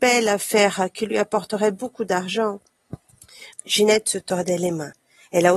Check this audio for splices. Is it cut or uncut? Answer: cut